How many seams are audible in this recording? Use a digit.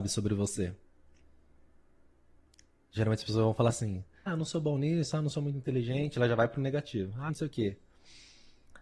2